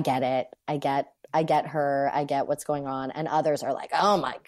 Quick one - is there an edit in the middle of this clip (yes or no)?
no